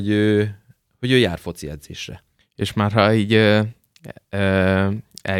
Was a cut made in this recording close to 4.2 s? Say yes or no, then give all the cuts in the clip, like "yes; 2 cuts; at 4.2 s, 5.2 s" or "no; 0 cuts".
no; 1 cut; at 2.4 s